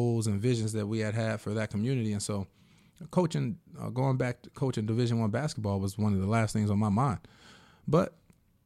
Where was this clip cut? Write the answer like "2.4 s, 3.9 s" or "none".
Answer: none

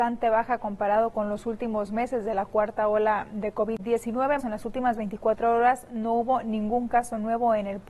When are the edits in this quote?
4.4 s

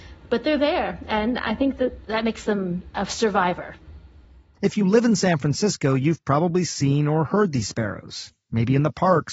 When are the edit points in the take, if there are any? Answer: none

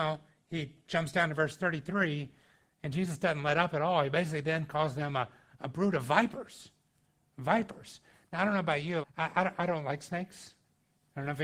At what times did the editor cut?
9.0 s

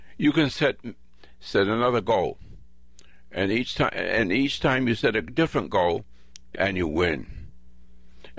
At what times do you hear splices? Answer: 6.5 s

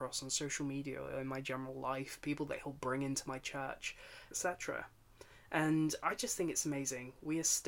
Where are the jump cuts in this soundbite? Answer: 4.3 s

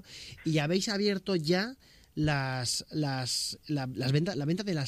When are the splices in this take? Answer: none

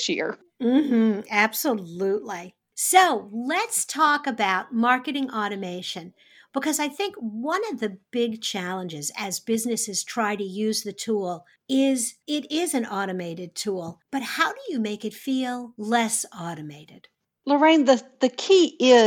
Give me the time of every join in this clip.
none

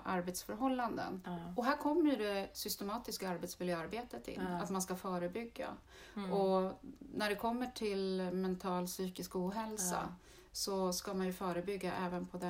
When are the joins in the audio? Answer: 1.2 s

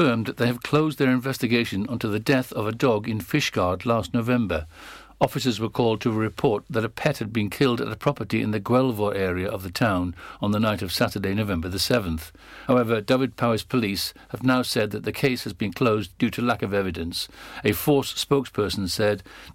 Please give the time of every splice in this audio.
none

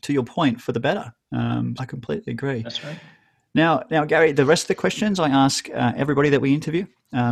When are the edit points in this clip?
1.8 s

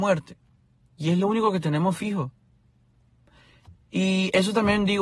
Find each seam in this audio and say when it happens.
none

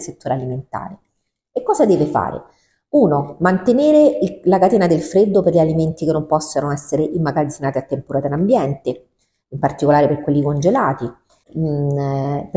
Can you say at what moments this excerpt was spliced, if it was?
11.4 s

